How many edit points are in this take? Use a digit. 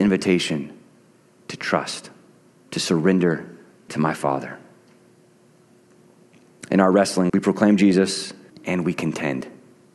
2